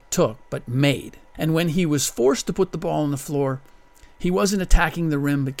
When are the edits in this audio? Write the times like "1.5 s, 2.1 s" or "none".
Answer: 1.3 s